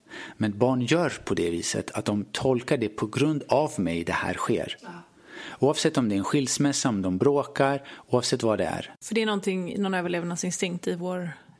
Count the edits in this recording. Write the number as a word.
zero